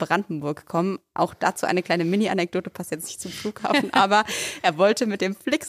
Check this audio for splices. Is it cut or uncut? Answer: uncut